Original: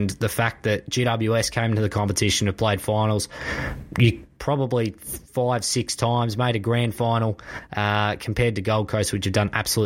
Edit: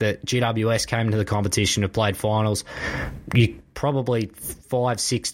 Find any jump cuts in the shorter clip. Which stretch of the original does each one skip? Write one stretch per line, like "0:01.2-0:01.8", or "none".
none